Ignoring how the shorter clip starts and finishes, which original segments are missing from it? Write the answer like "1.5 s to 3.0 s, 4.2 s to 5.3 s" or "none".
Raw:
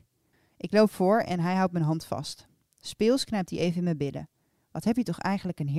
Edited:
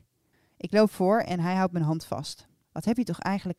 2.6 s to 4.6 s